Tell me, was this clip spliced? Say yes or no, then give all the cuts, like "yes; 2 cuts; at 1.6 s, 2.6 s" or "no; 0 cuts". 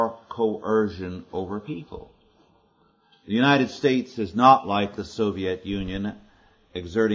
no; 0 cuts